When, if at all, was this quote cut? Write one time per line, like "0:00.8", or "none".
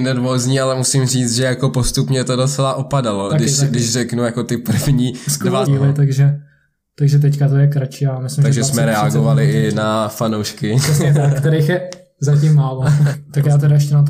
0:03.3
0:05.7
0:13.1

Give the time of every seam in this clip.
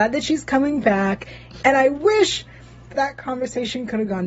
0:01.6
0:02.9

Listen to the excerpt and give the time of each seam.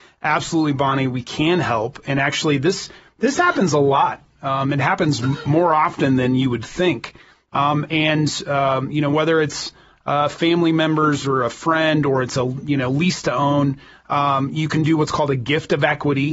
none

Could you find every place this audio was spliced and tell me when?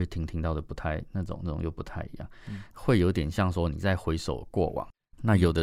0:02.7

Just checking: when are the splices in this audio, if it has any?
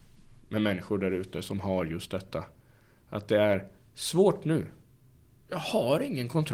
none

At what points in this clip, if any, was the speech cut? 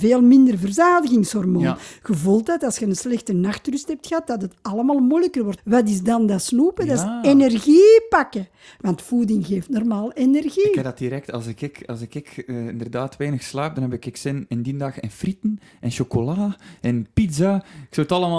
0:05.6

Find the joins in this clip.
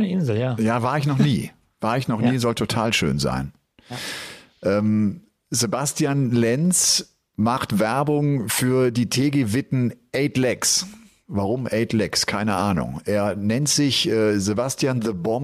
none

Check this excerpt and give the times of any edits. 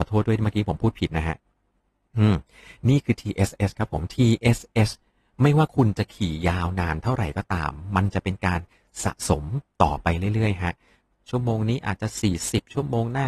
none

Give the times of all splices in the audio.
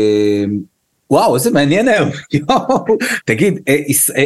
0:03.2

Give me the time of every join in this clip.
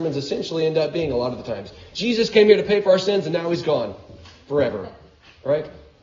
none

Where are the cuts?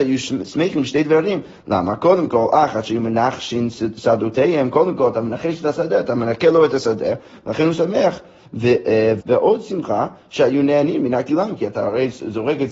0:09.2

